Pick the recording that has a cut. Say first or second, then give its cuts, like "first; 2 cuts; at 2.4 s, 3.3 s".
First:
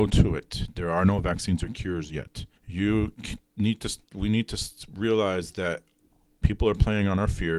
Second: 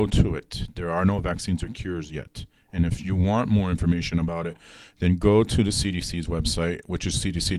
first; 2 cuts; at 2.6 s, 6.4 s